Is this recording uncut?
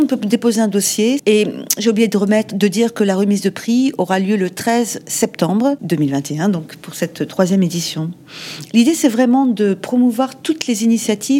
no; 1 cut; at 1.2 s

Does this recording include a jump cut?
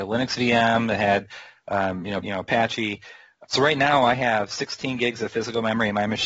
yes; 2 cuts; at 2.2 s, 3.4 s

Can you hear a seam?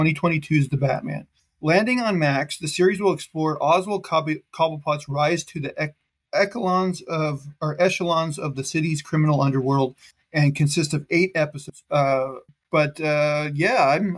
yes; 1 cut; at 11.8 s

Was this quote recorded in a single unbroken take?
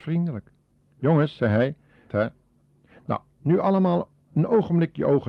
no; 1 cut; at 2.1 s

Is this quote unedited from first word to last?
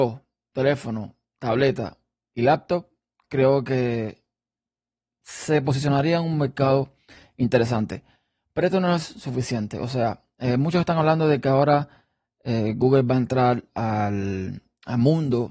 yes; 0 cuts

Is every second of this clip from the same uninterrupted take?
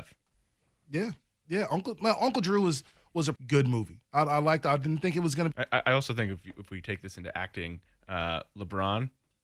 no; 2 cuts; at 3.3 s, 5.5 s

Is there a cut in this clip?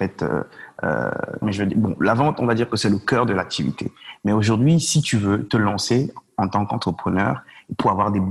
yes; 1 cut; at 1.4 s

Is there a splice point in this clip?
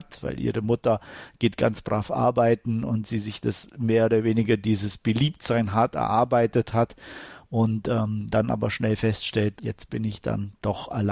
yes; 2 cuts; at 8.3 s, 9.6 s

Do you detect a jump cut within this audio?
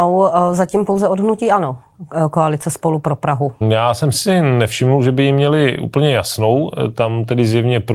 yes; 1 cut; at 3.6 s

